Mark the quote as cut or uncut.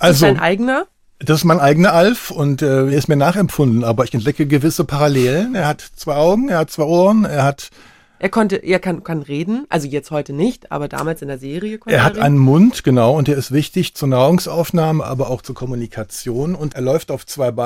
cut